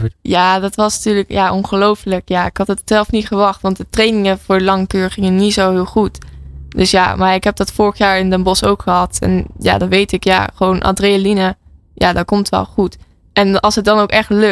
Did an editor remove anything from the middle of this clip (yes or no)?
no